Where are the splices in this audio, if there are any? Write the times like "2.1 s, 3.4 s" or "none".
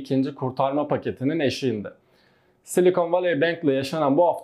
none